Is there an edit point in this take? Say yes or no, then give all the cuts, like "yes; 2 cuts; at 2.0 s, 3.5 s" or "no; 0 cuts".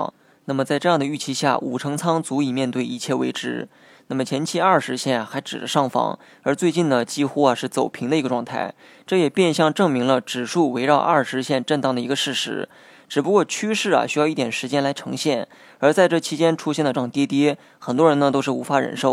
yes; 1 cut; at 16.9 s